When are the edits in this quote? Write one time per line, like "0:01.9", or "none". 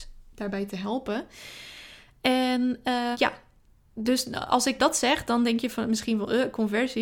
0:03.1
0:04.8

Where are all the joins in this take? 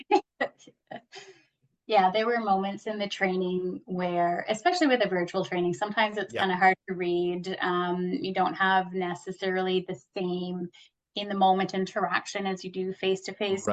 none

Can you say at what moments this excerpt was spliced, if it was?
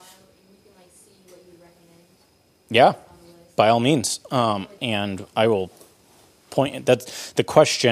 0:04.8

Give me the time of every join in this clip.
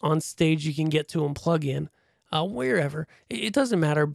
none

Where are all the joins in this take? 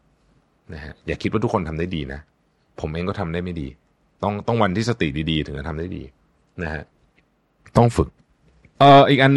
none

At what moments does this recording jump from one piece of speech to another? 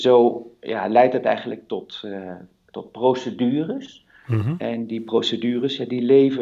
none

